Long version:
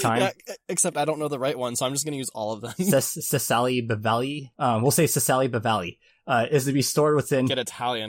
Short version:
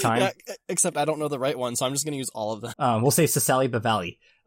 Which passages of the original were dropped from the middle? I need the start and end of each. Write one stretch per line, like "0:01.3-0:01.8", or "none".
0:02.7-0:04.5